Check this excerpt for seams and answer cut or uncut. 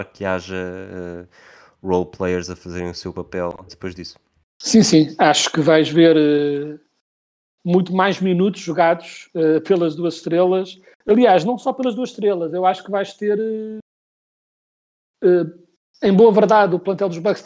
cut